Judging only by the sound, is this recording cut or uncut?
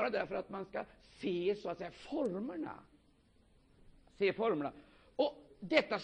uncut